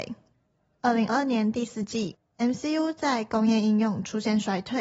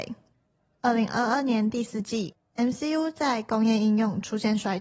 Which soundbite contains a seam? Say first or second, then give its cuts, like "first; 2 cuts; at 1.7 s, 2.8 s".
first; 1 cut; at 1.1 s